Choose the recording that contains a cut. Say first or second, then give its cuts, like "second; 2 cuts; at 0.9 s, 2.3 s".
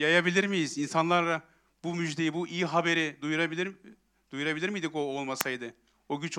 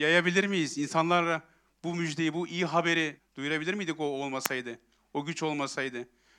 second; 1 cut; at 3.2 s